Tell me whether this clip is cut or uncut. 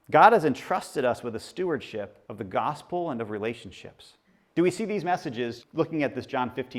cut